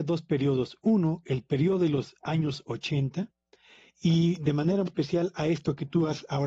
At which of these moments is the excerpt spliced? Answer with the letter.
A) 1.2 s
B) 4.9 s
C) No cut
B